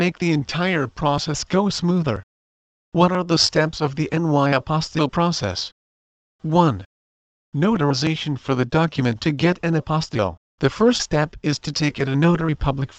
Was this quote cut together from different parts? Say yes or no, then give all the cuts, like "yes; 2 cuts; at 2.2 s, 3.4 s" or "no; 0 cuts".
no; 0 cuts